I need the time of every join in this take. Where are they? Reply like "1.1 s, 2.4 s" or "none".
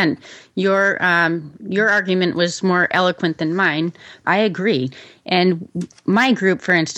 4.2 s